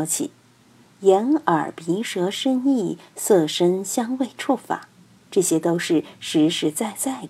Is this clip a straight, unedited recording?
yes; 0 cuts

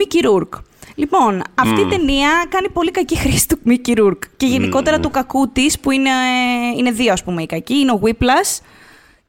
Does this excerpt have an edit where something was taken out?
no; 0 cuts

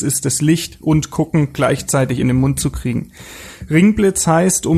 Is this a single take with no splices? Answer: yes; 0 cuts

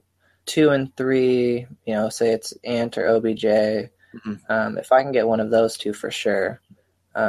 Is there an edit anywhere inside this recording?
no; 0 cuts

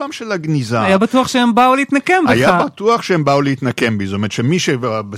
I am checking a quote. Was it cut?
no; 0 cuts

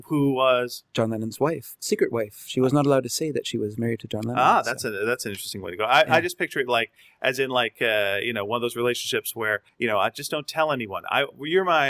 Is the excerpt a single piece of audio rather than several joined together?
yes; 0 cuts

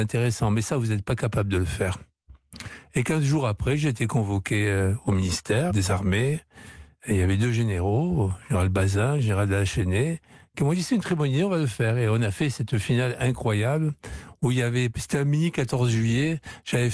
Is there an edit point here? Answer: yes; 1 cut; at 5.7 s

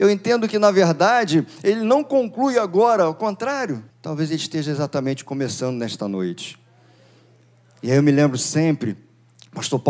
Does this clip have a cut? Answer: yes; 1 cut; at 3.9 s

